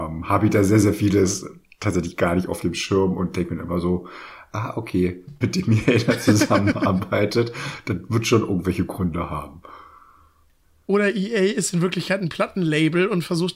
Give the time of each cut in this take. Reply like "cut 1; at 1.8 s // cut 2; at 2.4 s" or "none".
cut 1; at 5.4 s